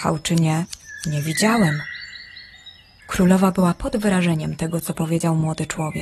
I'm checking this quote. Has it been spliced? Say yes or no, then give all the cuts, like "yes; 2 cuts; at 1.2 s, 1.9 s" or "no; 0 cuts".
yes; 1 cut; at 3.0 s